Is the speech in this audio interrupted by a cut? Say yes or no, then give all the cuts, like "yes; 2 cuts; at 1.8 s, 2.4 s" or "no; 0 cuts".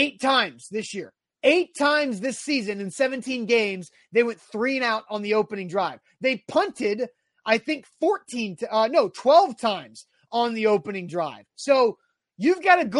no; 0 cuts